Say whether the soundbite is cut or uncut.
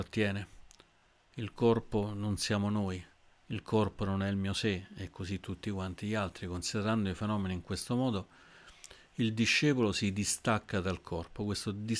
uncut